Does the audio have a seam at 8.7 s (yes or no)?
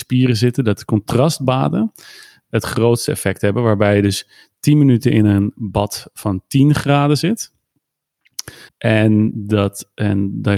yes